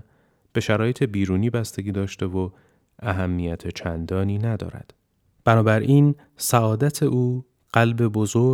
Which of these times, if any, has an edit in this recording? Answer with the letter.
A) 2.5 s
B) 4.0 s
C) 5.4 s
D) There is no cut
C